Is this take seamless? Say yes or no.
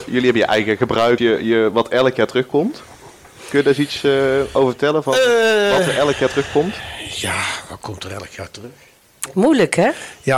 no